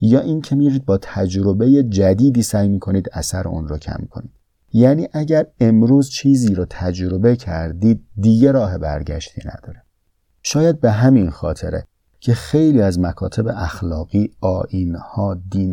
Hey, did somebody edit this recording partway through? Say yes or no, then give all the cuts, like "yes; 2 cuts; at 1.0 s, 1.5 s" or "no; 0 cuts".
no; 0 cuts